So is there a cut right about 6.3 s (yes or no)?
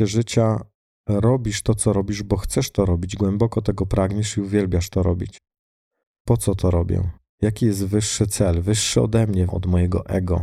yes